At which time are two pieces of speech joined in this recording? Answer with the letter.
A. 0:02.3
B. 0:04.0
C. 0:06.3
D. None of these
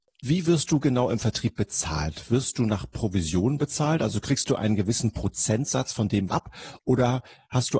C